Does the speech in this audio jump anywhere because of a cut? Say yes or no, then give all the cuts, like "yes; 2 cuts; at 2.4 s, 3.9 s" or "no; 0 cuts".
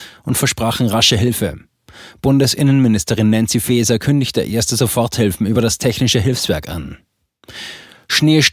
no; 0 cuts